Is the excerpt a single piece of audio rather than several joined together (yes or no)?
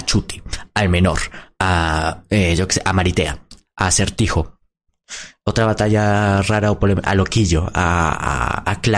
yes